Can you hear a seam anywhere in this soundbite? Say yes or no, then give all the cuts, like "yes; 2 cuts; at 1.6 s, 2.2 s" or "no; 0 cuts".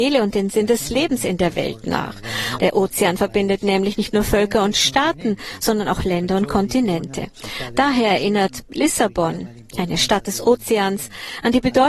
yes; 1 cut; at 2.6 s